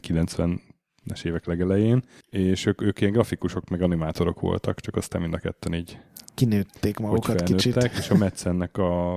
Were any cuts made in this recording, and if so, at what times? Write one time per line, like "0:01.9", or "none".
none